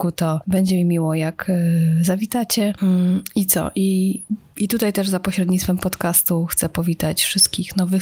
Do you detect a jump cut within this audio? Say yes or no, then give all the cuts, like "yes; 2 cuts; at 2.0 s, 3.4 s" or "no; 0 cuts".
yes; 1 cut; at 2.8 s